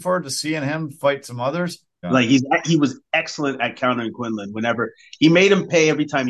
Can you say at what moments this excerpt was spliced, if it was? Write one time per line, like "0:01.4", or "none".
0:02.0